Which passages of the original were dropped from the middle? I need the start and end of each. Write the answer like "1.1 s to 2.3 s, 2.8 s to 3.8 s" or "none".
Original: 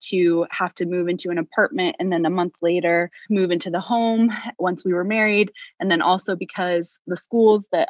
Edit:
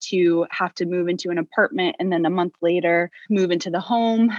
none